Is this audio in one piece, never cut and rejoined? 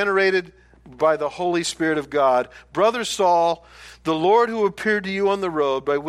yes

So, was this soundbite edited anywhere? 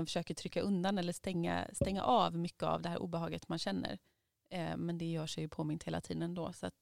no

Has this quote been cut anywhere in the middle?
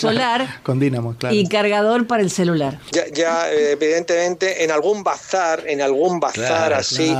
yes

